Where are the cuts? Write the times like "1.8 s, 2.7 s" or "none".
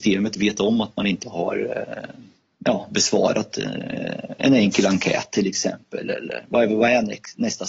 none